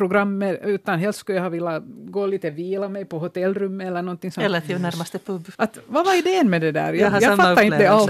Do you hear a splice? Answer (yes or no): yes